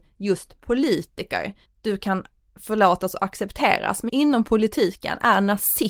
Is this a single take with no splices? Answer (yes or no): no